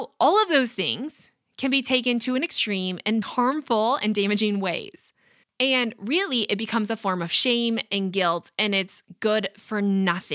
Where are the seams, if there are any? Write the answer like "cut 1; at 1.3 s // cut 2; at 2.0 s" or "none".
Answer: cut 1; at 3.2 s // cut 2; at 5.4 s